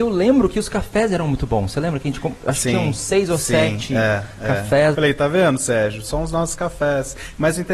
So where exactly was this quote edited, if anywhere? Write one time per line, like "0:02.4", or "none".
0:04.9

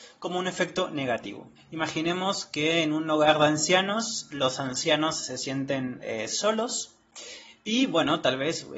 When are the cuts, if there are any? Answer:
0:01.6

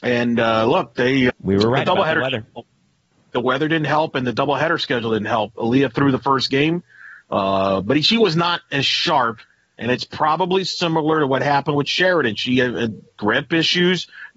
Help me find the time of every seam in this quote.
0:01.3

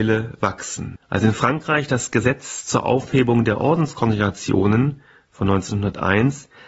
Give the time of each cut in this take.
0:00.9

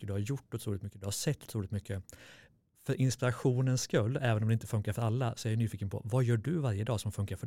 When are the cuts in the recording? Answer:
none

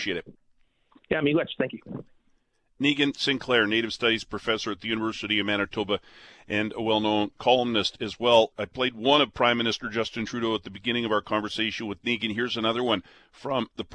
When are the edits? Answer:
0:08.5

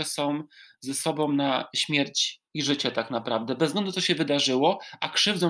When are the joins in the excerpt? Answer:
0:02.5

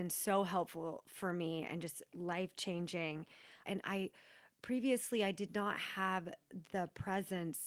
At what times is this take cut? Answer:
0:03.7

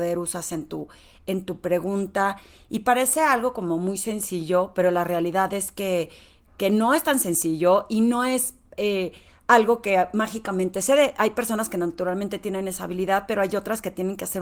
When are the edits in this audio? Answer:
none

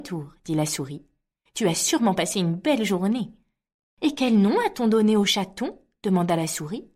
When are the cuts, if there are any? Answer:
0:04.0

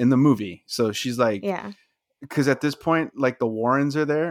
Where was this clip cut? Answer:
none

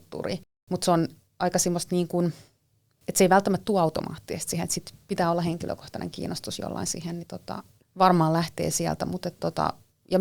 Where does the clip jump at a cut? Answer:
none

